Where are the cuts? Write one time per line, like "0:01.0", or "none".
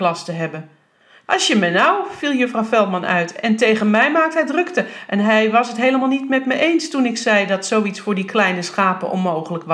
0:01.3